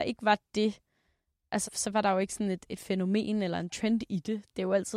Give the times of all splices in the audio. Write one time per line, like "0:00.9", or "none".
0:01.6

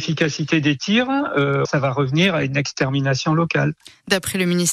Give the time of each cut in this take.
0:01.6

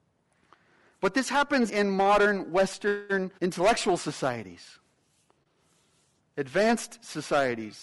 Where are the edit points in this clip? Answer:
0:01.7
0:03.4

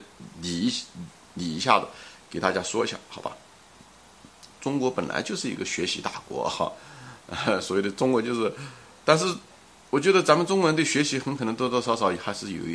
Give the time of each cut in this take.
none

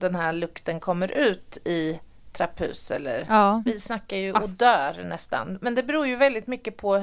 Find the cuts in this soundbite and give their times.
0:03.7

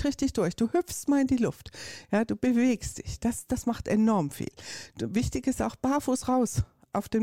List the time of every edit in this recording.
none

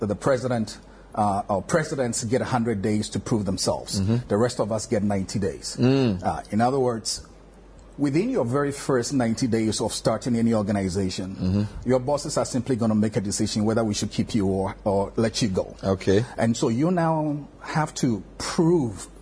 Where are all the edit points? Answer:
none

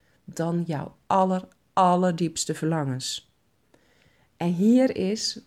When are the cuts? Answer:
0:01.0

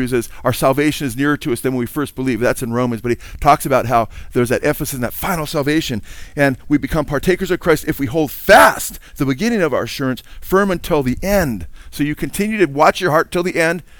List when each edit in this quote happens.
none

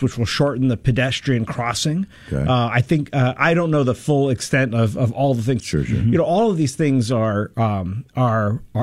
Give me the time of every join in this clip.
0:05.6

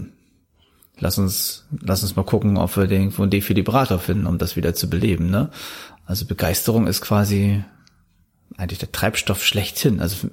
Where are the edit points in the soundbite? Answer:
0:01.0

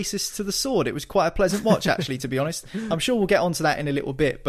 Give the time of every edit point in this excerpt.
none

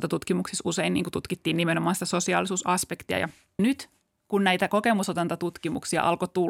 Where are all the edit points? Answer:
none

